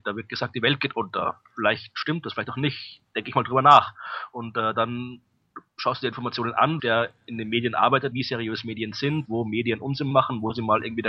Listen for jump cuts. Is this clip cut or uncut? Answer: cut